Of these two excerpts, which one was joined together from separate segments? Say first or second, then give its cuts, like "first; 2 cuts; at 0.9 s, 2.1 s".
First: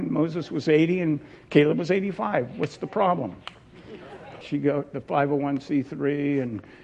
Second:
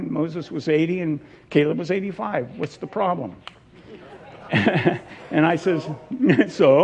first; 1 cut; at 4.4 s